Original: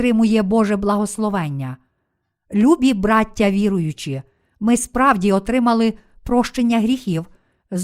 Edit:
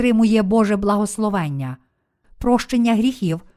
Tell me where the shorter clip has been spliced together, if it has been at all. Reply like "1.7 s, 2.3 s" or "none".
2.2 s

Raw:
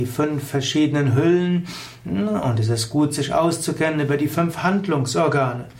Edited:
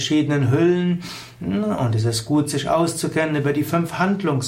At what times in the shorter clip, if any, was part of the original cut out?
none

